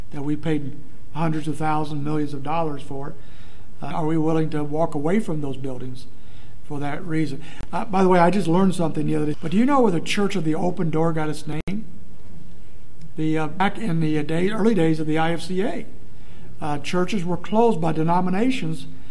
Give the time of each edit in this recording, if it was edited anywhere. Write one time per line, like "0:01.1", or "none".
0:03.9
0:09.3

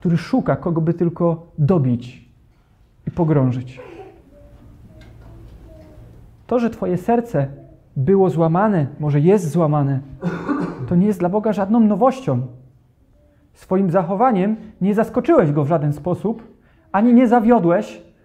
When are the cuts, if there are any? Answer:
none

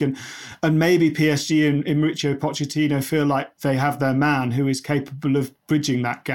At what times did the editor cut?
none

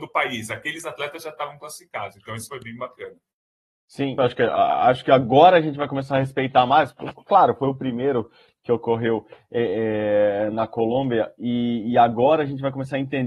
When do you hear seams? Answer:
0:04.2

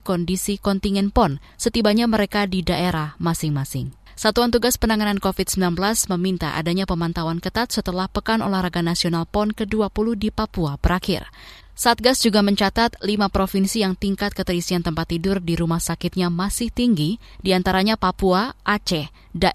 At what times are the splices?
0:04.1
0:11.6

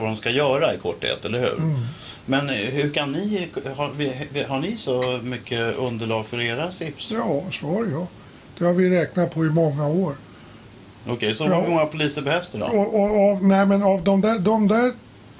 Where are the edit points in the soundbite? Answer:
none

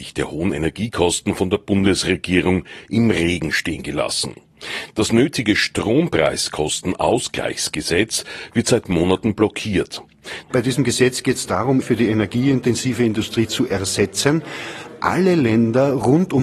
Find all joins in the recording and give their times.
0:10.4
0:11.8

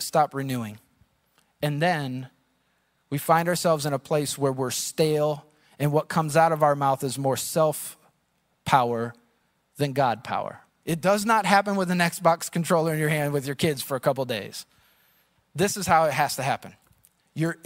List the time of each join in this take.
0:10.8

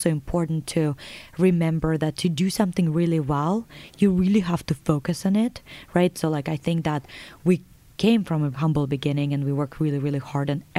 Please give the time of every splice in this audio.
0:06.1
0:08.5

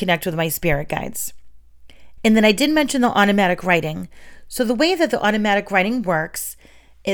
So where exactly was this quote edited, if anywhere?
0:02.2

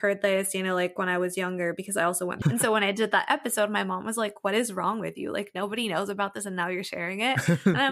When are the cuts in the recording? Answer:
0:02.4

